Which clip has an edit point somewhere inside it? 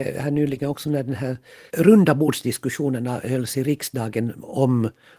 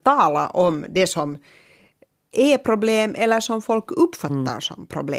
first; 1 cut; at 1.7 s

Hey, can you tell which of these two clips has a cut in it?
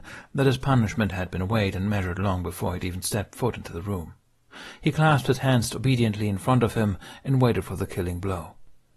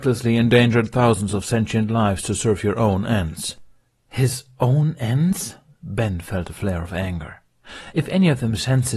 second; 1 cut; at 7.9 s

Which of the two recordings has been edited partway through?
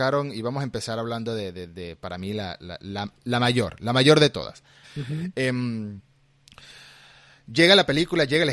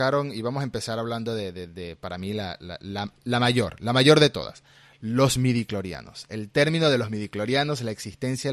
first; 1 cut; at 4.8 s

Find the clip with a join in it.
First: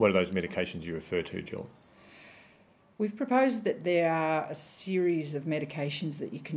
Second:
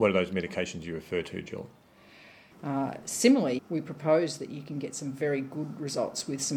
second; 2 cuts; at 2.5 s, 3.6 s

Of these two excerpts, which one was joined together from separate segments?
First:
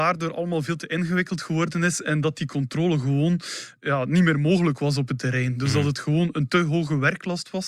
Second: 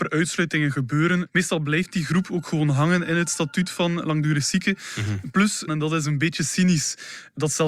second; 1 cut; at 5.7 s

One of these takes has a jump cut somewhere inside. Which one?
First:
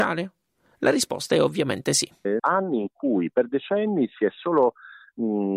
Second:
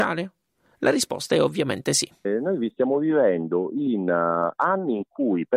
first; 1 cut; at 2.4 s

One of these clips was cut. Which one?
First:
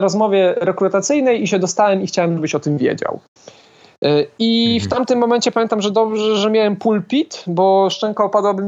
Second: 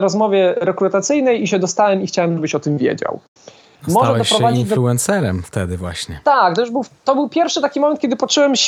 second; 1 cut; at 3.7 s

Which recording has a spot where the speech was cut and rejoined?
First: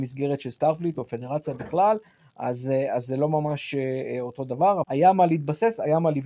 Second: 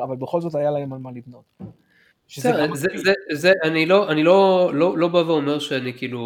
first; 1 cut; at 4.8 s

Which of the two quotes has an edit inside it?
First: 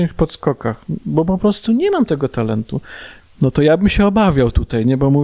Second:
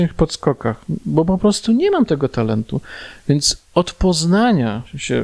first; 1 cut; at 3.2 s

